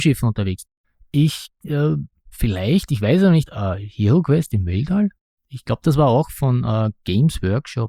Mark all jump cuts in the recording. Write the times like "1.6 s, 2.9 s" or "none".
3.5 s

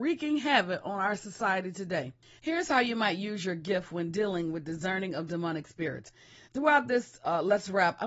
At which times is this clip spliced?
2.4 s, 6.5 s

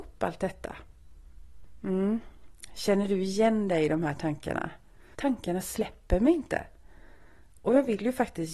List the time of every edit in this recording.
5.1 s

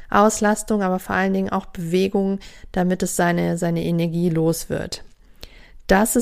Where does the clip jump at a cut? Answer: none

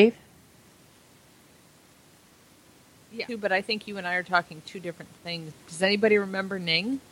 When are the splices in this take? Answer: 3.3 s, 5.5 s

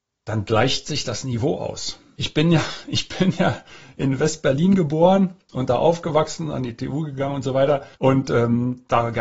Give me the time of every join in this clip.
2.1 s, 7.9 s

